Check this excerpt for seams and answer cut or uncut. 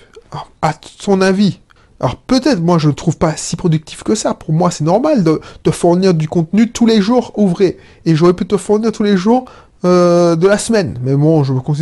uncut